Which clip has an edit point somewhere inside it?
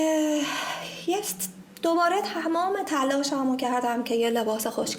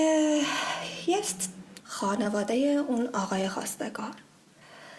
second; 1 cut; at 1.8 s

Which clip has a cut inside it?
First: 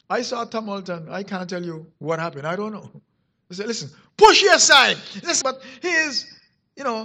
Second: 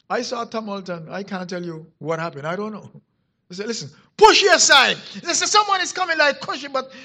first; 1 cut; at 5.4 s

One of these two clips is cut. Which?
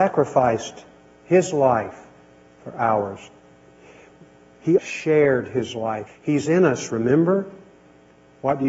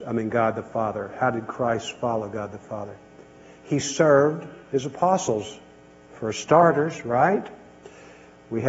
first; 2 cuts; at 4.8 s, 6.1 s

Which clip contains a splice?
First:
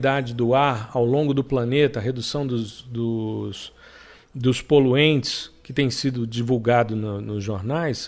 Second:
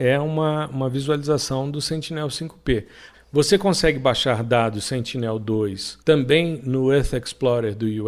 second; 2 cuts; at 3.1 s, 6.0 s

